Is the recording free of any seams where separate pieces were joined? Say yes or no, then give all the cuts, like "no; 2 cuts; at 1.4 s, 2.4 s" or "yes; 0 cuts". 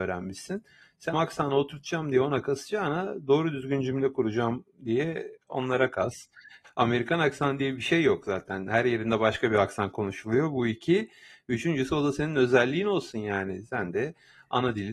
no; 2 cuts; at 1.1 s, 6.6 s